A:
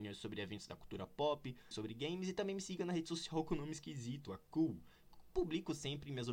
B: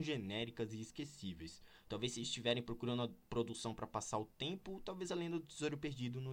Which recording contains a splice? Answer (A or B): A